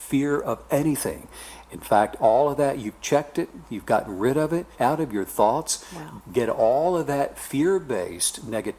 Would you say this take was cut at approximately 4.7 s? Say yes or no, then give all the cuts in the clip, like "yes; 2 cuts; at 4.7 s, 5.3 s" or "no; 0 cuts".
yes; 2 cuts; at 4.7 s, 6.2 s